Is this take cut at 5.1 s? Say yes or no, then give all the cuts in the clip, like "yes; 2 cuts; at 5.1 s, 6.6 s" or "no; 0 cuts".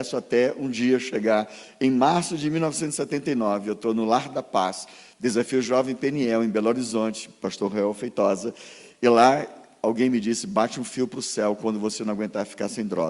no; 0 cuts